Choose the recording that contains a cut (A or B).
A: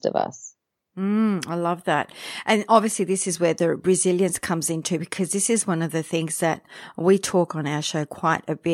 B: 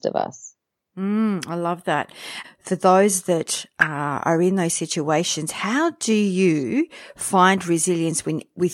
B